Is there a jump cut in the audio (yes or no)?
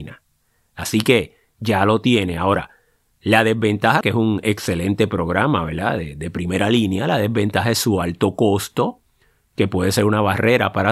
yes